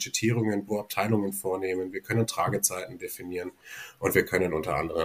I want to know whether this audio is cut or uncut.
uncut